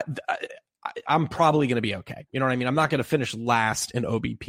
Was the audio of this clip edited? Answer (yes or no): no